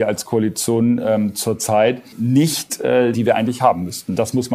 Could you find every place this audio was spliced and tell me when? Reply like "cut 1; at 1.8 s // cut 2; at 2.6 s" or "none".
cut 1; at 2.1 s // cut 2; at 3.1 s